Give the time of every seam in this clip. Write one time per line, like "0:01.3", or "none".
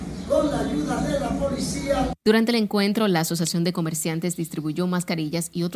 0:02.2